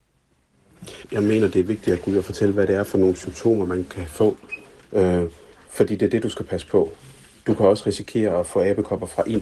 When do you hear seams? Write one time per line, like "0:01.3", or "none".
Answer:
0:01.0